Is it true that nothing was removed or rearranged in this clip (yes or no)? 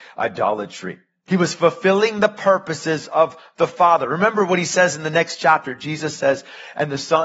no